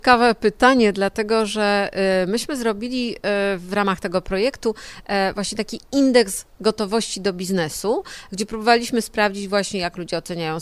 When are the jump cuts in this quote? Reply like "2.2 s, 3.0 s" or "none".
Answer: 8.3 s

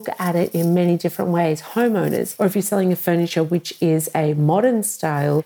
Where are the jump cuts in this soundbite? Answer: 2.4 s

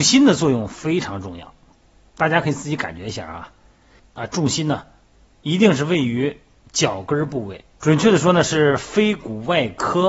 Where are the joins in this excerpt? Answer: 4.0 s, 7.7 s

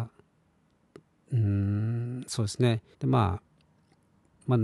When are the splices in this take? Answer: 2.9 s

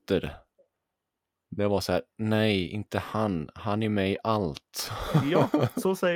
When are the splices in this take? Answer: none

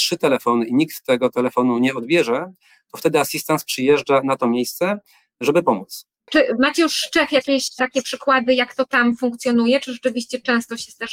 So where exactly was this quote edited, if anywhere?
6.3 s

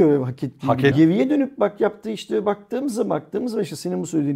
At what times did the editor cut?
0.9 s

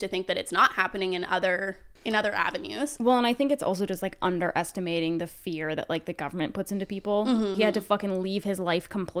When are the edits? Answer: 2.0 s, 7.5 s

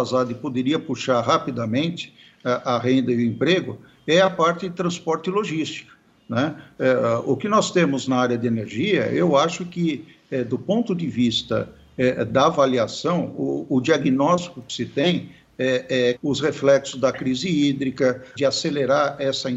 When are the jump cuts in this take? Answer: 16.2 s, 18.4 s

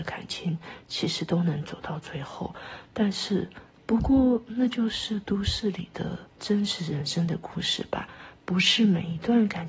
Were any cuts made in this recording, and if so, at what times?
3.8 s, 6.3 s

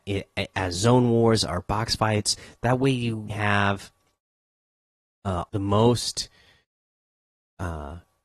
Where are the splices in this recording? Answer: 3.3 s, 5.5 s

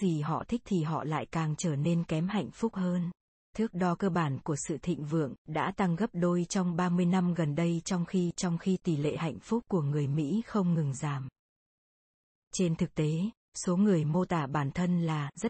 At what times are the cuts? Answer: 3.4 s, 5.4 s

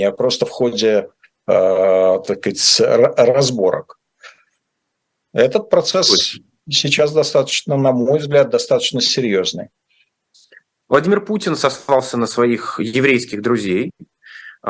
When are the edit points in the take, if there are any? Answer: 10.8 s

